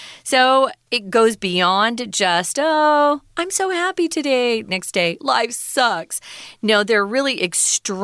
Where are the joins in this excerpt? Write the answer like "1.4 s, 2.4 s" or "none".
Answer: 5.2 s